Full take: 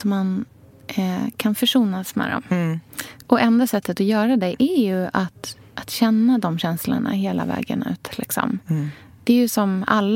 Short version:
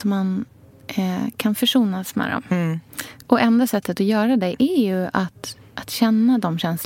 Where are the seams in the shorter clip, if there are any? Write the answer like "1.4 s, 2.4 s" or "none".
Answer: none